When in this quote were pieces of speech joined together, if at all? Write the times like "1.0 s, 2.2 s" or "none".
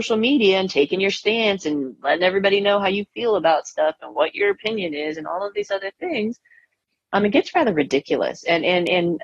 7.1 s